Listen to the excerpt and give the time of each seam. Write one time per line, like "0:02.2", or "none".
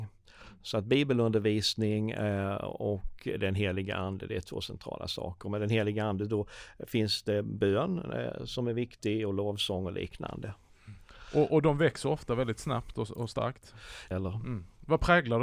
0:14.1